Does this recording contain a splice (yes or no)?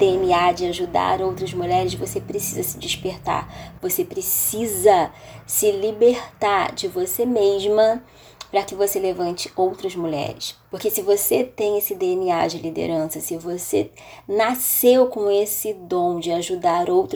yes